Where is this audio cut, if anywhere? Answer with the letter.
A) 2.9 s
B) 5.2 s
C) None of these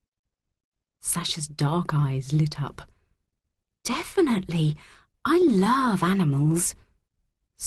C